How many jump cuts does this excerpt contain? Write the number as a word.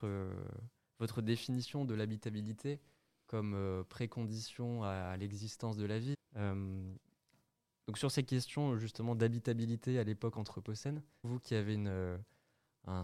two